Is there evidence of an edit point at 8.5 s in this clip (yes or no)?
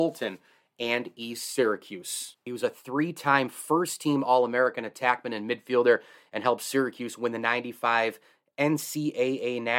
no